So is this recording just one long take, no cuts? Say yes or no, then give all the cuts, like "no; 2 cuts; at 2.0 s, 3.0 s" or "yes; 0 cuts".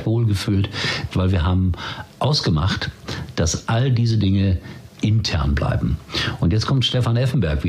no; 1 cut; at 1.1 s